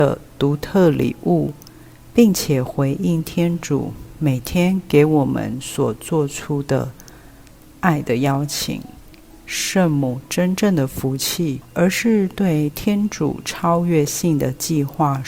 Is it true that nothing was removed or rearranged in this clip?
no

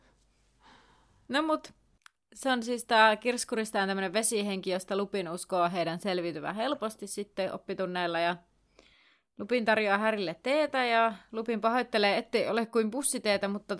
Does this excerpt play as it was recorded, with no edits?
yes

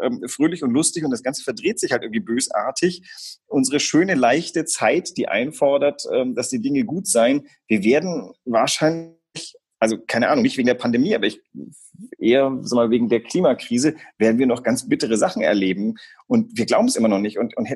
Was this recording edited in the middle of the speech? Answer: no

